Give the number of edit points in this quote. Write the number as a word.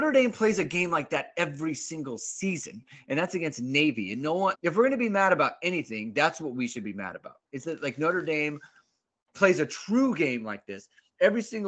one